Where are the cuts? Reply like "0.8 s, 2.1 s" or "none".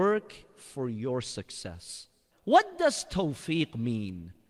2.3 s